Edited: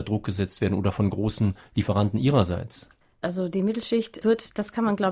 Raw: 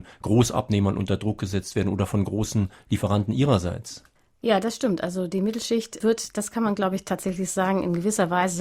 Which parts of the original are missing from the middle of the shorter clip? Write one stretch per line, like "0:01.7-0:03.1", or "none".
0:04.4-0:05.0

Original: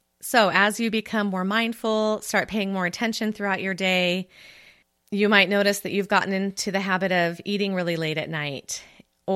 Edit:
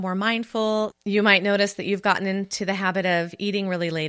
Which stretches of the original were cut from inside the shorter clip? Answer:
0:02.2-0:05.0

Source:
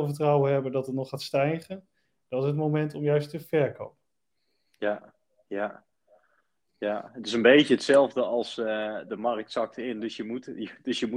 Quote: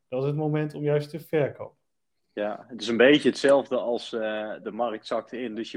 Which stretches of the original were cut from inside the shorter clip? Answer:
0:04.4-0:06.6

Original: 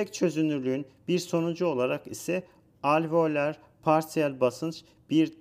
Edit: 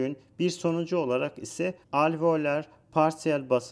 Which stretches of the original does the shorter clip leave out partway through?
0:02.5-0:02.7

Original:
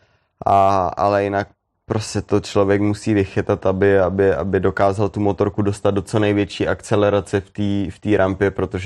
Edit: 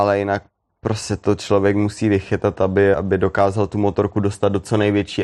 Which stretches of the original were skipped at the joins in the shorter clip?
0:04.0-0:04.4

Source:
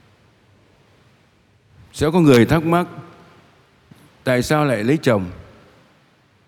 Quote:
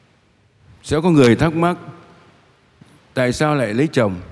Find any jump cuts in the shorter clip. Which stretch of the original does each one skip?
none

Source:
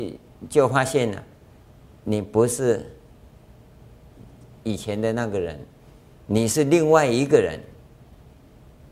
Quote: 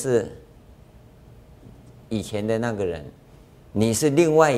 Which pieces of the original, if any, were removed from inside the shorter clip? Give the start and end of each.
none

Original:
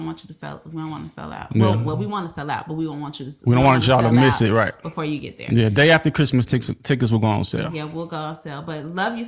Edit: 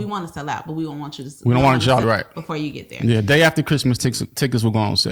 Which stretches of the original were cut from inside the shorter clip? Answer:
0:04.0-0:04.5

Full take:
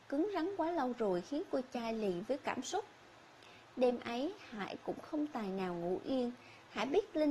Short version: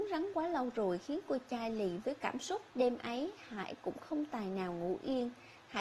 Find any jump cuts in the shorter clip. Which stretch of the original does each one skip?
0:02.9-0:03.7

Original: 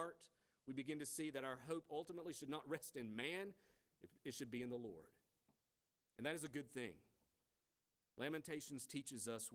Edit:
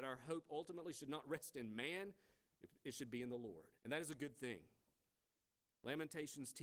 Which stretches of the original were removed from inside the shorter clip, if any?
0:05.2-0:06.1

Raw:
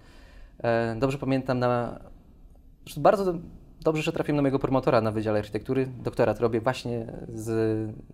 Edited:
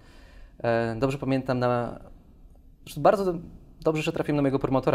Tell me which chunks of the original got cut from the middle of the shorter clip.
none

